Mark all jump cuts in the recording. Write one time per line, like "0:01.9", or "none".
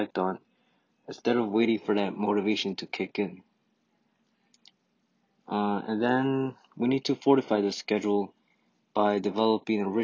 none